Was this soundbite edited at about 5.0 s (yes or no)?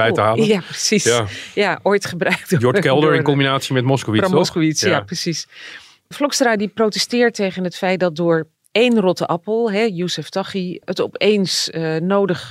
no